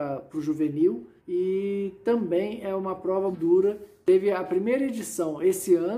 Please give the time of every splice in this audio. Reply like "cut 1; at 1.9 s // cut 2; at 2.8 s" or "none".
cut 1; at 1.2 s // cut 2; at 3.3 s